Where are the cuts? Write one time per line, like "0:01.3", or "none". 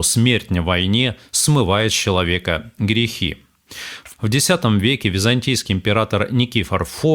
0:04.1